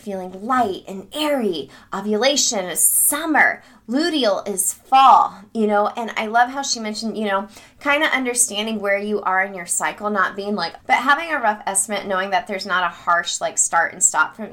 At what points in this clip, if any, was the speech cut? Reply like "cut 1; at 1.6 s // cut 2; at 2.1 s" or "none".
cut 1; at 10.8 s